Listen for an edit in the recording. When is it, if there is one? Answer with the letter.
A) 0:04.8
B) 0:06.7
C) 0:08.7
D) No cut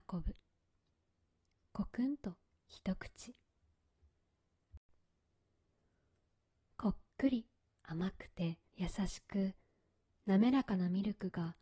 C